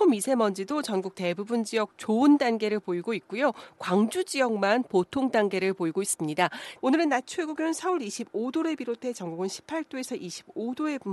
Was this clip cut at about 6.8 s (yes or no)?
yes